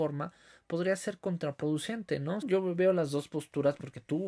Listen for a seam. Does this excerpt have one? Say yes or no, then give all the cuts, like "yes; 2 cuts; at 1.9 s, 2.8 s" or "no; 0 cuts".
yes; 1 cut; at 2.4 s